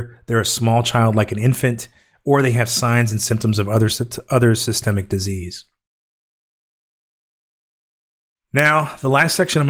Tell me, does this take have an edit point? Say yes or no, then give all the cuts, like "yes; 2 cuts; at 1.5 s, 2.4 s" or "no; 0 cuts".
no; 0 cuts